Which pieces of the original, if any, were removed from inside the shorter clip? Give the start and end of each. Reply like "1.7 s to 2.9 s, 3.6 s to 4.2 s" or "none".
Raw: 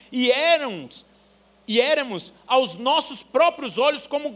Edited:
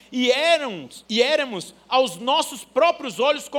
1.0 s to 1.6 s